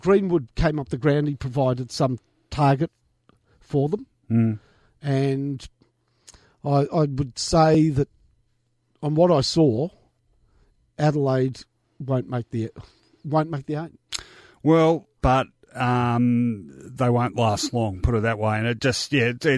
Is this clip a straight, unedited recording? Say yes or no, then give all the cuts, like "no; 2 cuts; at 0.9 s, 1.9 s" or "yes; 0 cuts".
no; 1 cut; at 15.2 s